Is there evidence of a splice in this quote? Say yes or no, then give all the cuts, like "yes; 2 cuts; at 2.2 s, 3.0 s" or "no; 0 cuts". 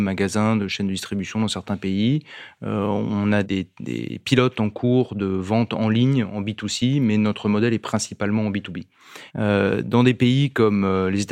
yes; 2 cuts; at 3.4 s, 9.3 s